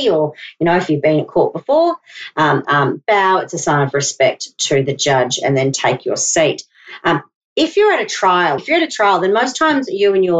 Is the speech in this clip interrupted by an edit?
yes; 2 cuts; at 2.6 s, 8.6 s

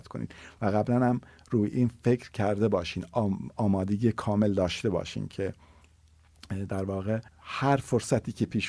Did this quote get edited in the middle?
yes; 1 cut; at 7.3 s

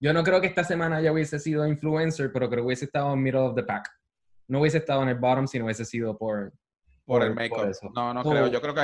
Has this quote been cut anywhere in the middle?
no; 0 cuts

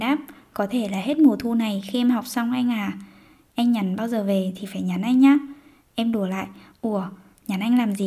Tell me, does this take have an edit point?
no; 0 cuts

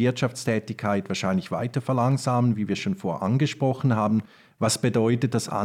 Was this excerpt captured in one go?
yes; 0 cuts

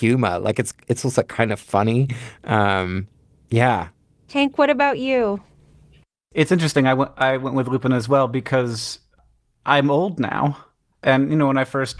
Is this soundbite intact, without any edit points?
yes; 0 cuts

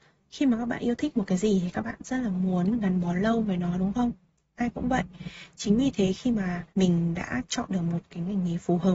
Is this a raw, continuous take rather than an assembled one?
no; 1 cut; at 6.7 s

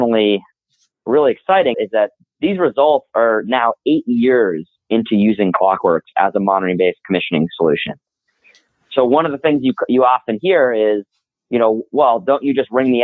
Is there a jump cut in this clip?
yes; 1 cut; at 1.7 s

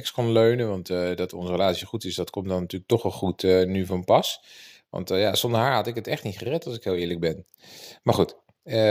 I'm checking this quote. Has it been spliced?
no; 0 cuts

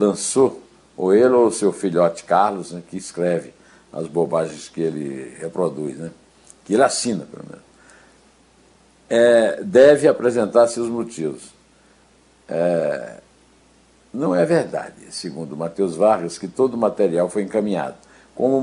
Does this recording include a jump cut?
no; 0 cuts

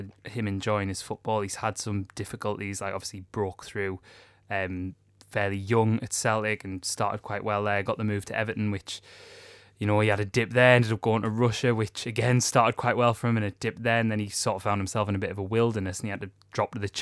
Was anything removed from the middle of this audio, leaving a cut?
no; 0 cuts

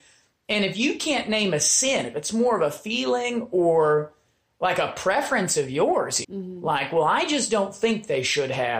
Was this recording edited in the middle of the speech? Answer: yes; 1 cut; at 6.2 s

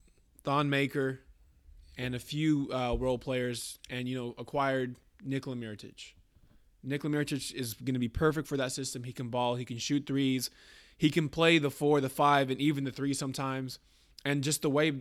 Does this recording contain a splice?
no; 0 cuts

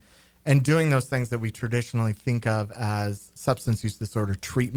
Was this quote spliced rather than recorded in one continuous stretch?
yes; 1 cut; at 3.4 s

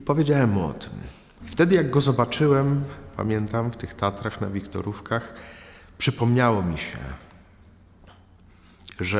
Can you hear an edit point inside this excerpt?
yes; 1 cut; at 1.4 s

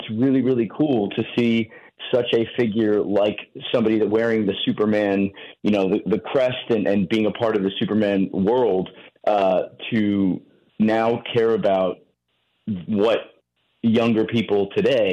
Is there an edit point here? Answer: no; 0 cuts

